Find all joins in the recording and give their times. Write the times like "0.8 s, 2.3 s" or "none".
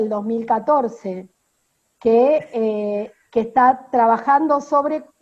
none